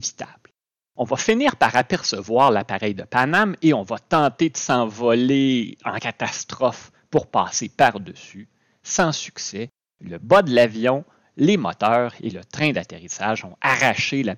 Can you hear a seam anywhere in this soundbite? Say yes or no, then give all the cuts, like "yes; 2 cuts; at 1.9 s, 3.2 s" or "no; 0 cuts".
no; 0 cuts